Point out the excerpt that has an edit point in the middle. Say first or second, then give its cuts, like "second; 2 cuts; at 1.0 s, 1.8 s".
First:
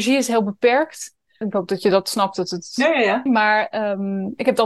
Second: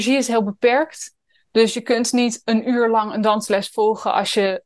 first; 2 cuts; at 1.4 s, 3.3 s